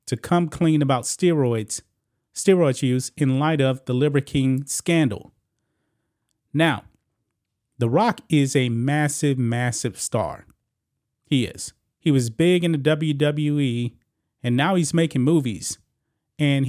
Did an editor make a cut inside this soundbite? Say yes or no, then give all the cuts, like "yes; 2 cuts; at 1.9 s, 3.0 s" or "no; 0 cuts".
no; 0 cuts